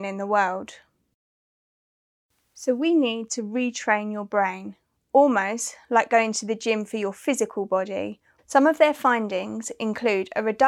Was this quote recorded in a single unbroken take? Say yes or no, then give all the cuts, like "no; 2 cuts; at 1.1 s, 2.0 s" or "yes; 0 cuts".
no; 1 cut; at 8.4 s